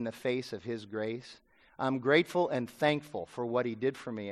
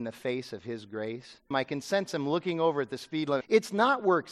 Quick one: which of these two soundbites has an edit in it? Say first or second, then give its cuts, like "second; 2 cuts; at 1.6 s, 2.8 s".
second; 2 cuts; at 1.5 s, 3.4 s